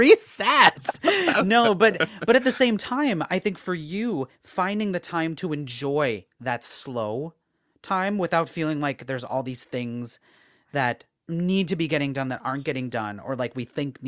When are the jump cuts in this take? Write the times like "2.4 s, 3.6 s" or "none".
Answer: none